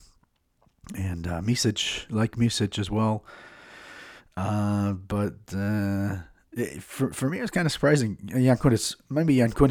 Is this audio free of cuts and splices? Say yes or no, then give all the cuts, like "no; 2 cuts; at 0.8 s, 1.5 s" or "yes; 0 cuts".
yes; 0 cuts